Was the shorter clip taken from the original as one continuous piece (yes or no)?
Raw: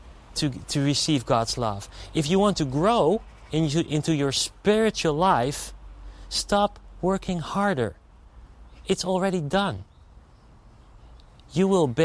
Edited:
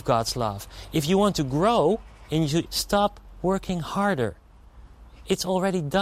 no